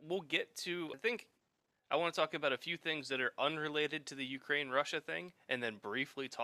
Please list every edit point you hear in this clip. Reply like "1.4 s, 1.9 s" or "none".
0.9 s